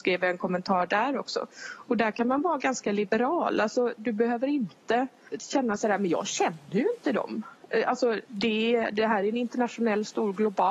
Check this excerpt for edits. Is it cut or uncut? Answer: cut